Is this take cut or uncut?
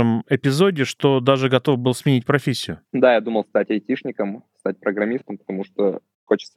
cut